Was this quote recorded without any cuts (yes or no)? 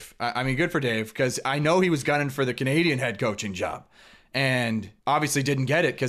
no